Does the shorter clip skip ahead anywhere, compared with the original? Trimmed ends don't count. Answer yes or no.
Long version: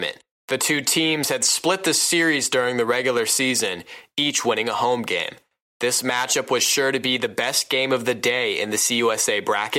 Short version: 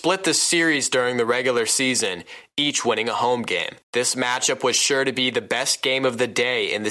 yes